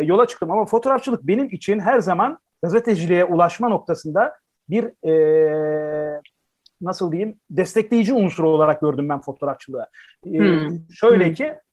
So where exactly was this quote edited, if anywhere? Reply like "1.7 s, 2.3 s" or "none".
none